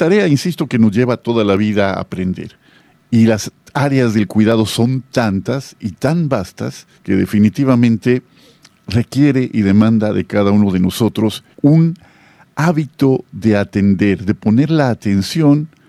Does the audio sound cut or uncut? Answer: cut